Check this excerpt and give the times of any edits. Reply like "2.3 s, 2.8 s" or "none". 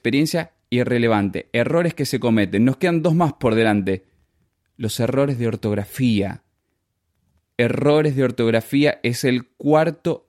none

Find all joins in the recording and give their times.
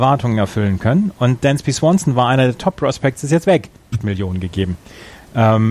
3.9 s

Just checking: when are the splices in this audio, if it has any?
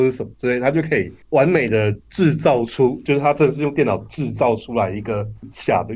1.2 s

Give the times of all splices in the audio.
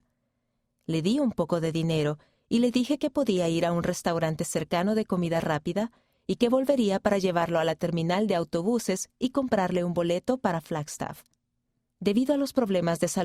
11.9 s

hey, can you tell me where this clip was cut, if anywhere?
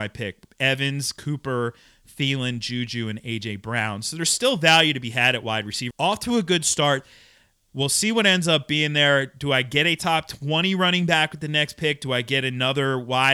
5.9 s, 7.7 s

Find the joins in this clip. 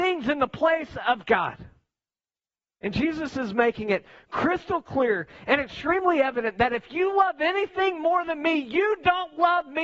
none

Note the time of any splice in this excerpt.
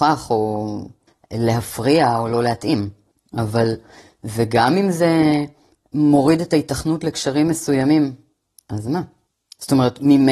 none

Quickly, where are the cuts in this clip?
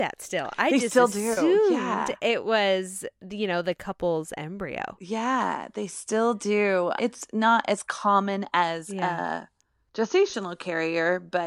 7.0 s

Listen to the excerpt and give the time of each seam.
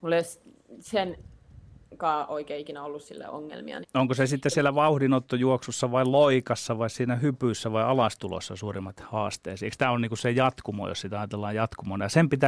3.8 s

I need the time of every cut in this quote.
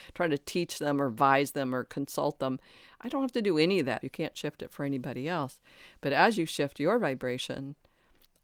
4.0 s

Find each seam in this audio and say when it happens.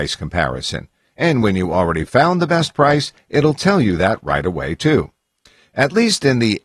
none

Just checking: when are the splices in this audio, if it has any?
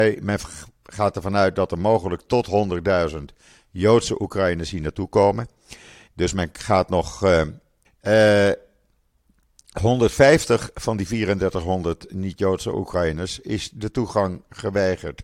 6.1 s, 7.8 s

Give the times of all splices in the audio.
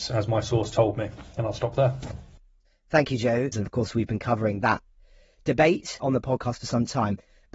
3.5 s, 6.0 s

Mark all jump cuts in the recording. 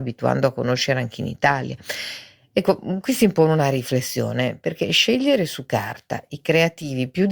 none

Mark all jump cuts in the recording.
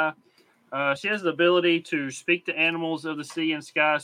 none

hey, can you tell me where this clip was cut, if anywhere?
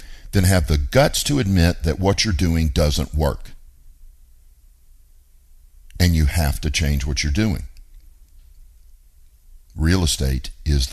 none

